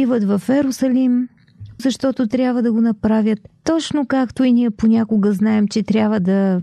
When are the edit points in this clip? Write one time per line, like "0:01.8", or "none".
0:01.8